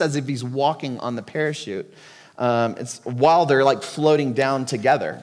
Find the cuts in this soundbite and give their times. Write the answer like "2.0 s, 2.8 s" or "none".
none